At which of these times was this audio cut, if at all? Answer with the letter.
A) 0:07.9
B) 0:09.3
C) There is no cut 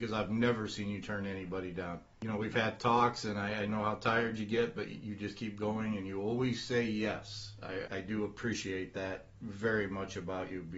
A